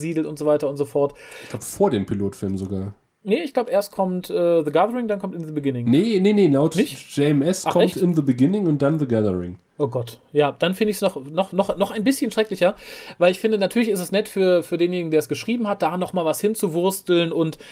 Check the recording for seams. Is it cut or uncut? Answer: uncut